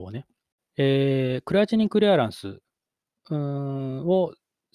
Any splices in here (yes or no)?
no